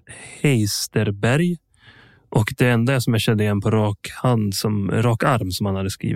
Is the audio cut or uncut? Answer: uncut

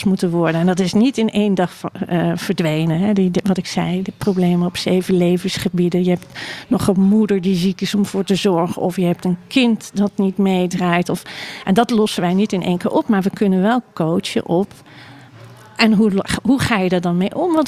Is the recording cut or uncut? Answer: uncut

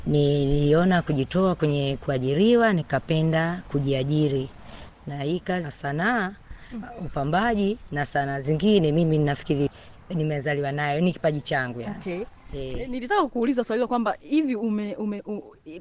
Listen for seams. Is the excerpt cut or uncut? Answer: uncut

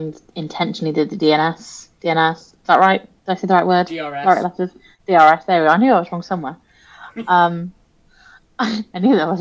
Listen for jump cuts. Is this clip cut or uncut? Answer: uncut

